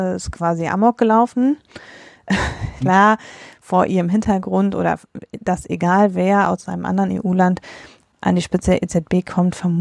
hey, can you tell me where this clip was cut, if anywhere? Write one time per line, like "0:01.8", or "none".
0:02.8